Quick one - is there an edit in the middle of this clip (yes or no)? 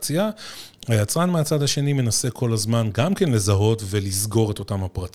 no